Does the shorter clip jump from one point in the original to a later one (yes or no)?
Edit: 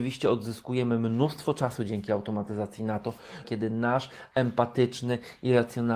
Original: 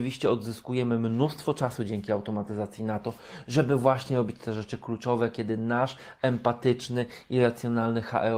yes